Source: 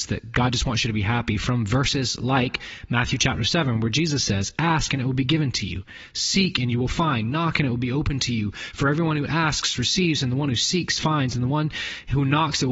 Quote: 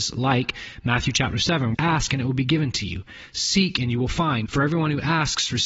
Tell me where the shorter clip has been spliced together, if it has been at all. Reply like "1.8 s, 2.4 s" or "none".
1.7 s, 4.5 s